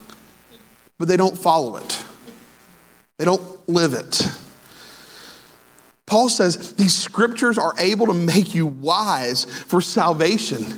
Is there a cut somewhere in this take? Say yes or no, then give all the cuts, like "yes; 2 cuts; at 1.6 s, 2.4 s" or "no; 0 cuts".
no; 0 cuts